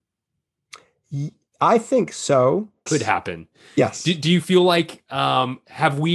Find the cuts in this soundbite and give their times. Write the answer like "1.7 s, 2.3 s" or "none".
2.9 s